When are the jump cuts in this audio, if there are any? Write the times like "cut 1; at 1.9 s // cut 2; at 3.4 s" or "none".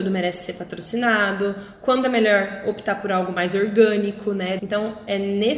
cut 1; at 4.6 s